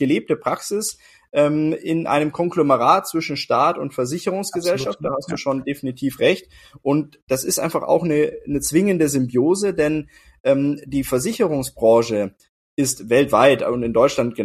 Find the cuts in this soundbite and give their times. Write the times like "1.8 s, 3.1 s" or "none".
none